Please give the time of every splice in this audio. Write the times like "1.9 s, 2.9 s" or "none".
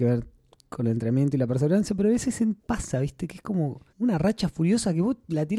2.6 s, 3.9 s